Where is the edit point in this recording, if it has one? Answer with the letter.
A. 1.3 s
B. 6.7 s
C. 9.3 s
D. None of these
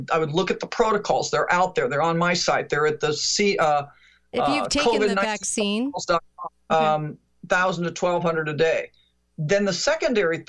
B